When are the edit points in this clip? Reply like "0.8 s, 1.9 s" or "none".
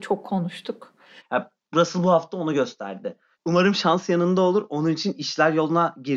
1.2 s, 3.3 s